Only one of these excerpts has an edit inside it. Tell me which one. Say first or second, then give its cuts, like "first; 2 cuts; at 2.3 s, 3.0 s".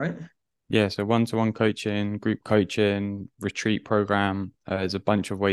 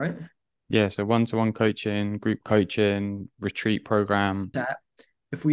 second; 1 cut; at 4.5 s